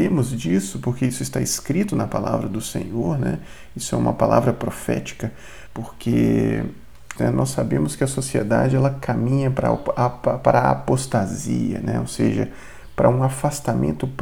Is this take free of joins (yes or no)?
no